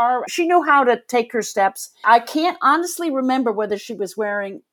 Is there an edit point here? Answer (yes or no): yes